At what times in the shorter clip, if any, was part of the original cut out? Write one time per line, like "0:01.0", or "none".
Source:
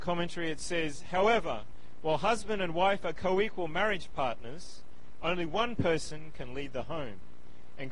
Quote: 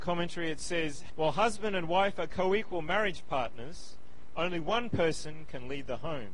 0:01.1